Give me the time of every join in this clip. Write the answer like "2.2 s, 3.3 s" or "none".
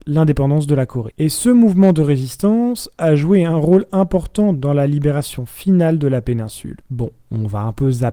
none